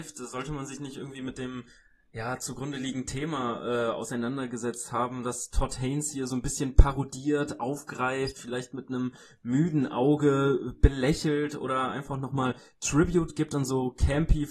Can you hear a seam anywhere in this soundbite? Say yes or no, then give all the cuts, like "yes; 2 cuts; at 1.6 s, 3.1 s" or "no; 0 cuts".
no; 0 cuts